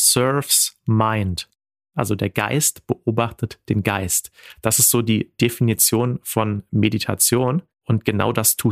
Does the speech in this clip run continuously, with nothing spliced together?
yes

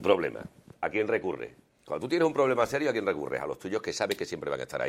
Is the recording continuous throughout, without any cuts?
no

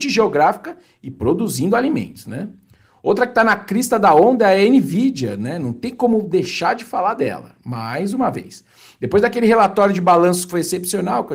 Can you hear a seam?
no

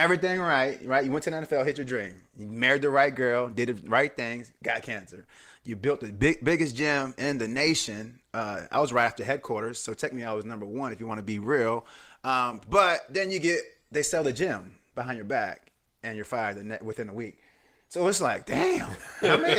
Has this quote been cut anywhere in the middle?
no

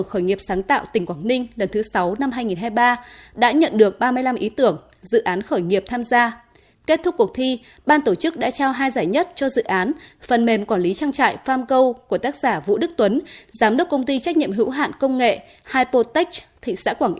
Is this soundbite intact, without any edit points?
yes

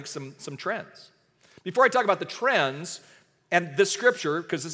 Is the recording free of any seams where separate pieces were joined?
yes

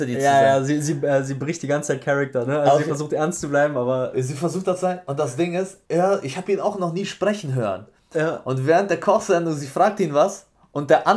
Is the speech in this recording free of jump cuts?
no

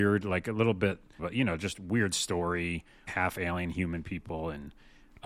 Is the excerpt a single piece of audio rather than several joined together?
no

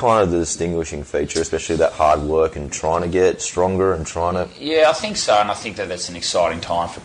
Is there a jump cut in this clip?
no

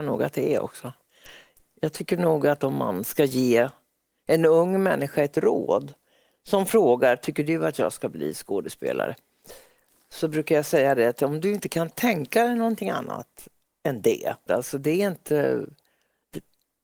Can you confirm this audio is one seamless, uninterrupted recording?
no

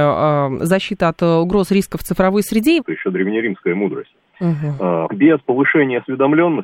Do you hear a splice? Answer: yes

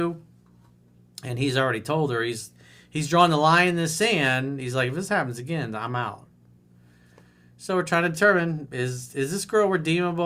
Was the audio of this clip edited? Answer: no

